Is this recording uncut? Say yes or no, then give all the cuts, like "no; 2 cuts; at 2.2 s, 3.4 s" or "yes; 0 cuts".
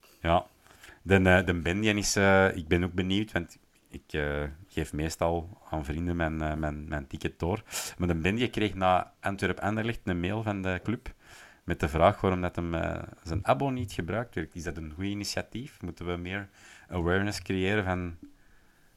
yes; 0 cuts